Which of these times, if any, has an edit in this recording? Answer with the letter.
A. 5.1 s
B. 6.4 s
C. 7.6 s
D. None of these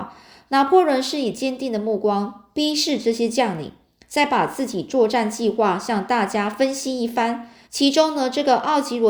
C